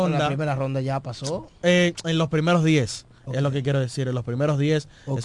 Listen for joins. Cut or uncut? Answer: uncut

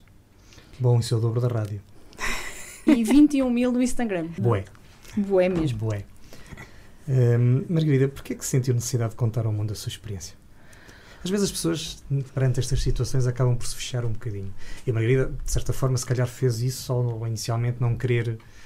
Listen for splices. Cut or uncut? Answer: cut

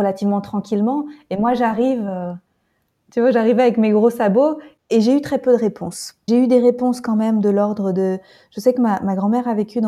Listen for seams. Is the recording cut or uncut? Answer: uncut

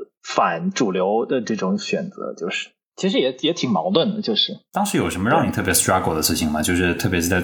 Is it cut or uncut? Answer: cut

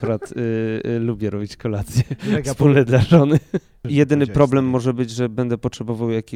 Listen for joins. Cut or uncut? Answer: uncut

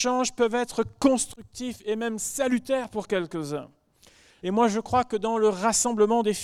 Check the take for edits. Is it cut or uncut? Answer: cut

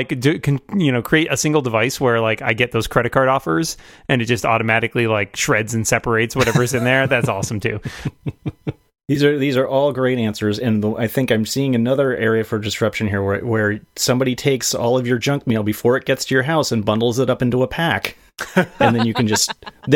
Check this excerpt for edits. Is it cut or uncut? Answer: uncut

